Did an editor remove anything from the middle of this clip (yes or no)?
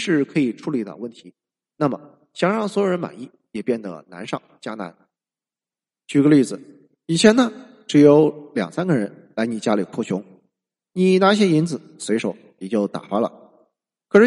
no